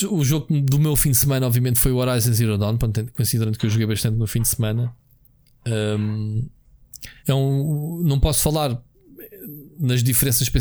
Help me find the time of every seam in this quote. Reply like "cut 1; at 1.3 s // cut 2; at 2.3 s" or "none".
cut 1; at 7.2 s